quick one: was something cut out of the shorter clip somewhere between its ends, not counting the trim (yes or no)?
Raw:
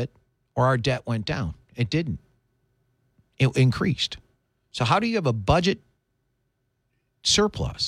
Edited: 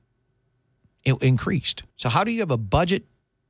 yes